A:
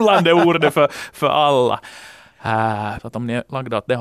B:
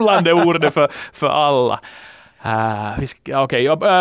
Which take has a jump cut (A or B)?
A